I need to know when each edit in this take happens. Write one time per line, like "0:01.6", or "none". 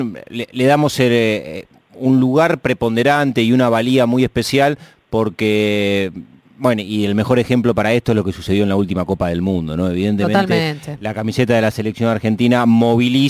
none